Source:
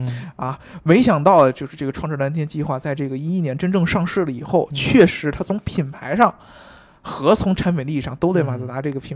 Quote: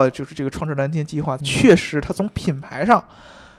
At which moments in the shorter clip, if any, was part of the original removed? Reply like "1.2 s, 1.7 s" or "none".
1.4 s